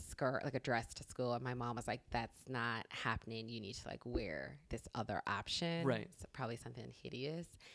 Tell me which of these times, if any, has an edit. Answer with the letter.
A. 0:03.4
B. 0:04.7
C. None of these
B